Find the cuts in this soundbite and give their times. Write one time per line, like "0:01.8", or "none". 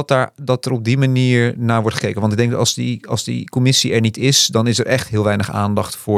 none